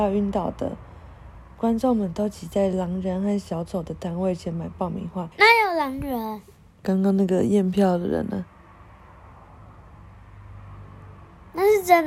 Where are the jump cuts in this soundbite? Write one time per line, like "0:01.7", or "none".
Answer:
0:05.3
0:06.8